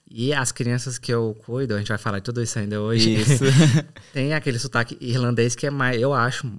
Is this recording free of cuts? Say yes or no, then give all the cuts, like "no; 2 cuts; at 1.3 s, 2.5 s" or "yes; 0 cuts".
yes; 0 cuts